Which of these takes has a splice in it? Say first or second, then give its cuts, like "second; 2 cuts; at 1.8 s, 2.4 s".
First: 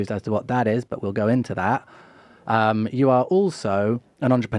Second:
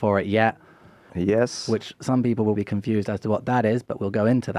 second; 2 cuts; at 1.1 s, 2.6 s